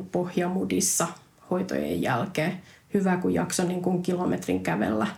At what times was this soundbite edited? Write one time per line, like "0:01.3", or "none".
none